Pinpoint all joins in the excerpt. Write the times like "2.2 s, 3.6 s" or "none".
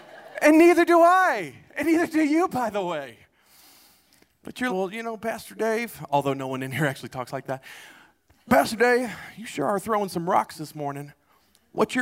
4.7 s